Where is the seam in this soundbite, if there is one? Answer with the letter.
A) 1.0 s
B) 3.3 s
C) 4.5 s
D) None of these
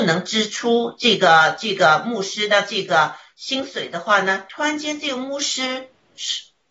C